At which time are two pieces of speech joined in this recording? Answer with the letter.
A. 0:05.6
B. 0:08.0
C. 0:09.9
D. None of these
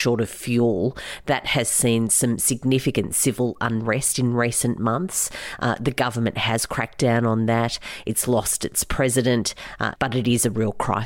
C